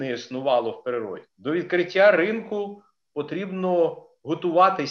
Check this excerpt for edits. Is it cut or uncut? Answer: cut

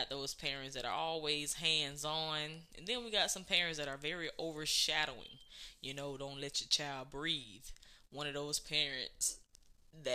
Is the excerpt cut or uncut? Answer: uncut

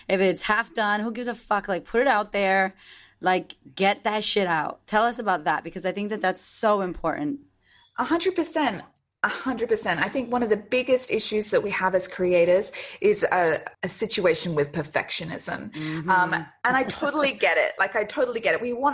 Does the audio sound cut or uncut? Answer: cut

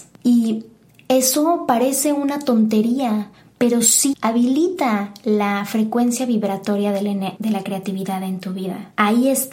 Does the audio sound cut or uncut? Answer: cut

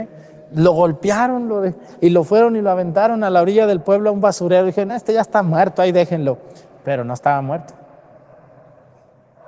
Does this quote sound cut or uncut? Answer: uncut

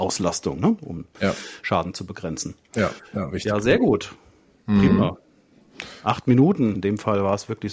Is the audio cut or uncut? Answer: cut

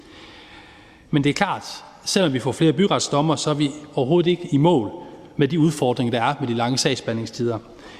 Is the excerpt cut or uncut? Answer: cut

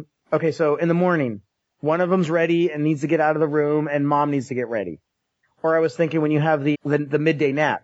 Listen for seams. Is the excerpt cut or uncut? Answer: cut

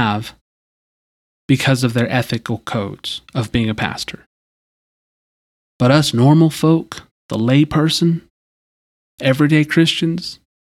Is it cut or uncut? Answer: cut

